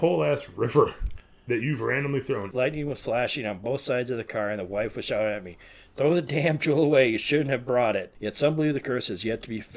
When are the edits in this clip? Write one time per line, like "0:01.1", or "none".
0:02.5
0:08.1

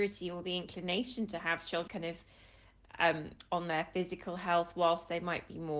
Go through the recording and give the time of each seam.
0:01.9

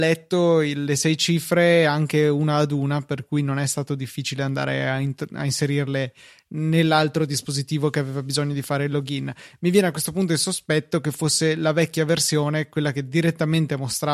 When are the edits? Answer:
none

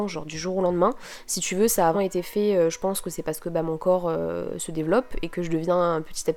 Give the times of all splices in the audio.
0:01.9

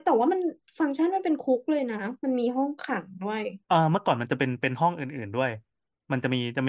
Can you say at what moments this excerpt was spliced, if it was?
0:03.6

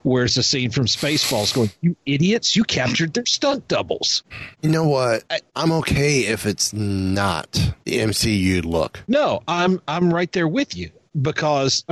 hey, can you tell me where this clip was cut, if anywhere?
none

